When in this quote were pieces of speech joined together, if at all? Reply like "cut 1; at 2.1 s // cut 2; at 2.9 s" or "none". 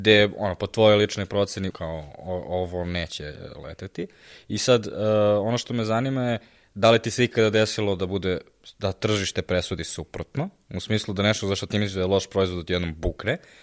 cut 1; at 1.7 s